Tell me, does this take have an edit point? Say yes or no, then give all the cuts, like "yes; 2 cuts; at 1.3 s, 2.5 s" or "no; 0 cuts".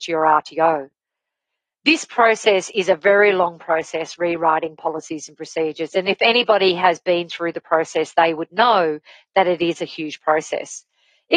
no; 0 cuts